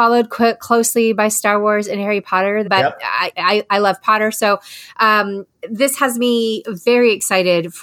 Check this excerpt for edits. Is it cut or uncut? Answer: cut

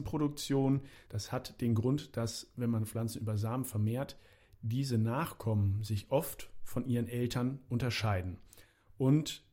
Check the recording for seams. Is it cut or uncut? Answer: cut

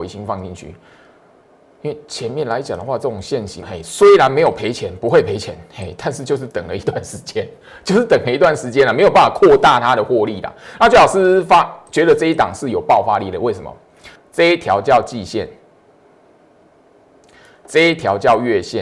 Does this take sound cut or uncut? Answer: cut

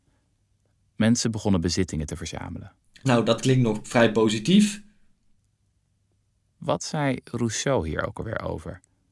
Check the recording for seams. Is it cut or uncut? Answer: uncut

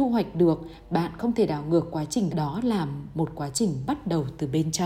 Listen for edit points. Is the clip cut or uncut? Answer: cut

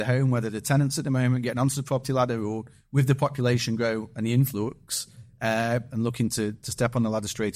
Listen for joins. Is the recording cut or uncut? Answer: cut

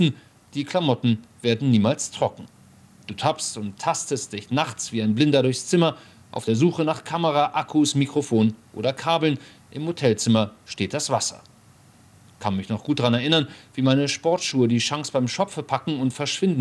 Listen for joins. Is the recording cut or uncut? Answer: uncut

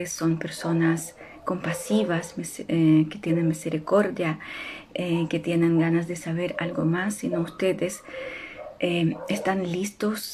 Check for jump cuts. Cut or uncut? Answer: uncut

